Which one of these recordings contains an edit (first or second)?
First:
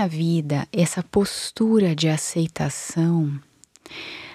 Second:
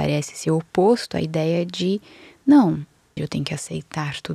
second